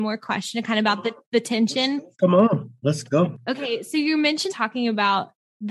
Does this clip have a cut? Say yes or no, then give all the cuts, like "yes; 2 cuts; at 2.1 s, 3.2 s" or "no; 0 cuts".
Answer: yes; 1 cut; at 4.5 s